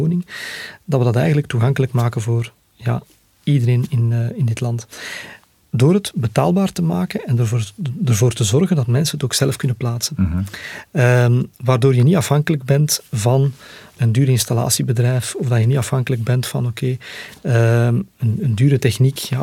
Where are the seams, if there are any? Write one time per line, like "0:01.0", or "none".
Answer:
0:14.0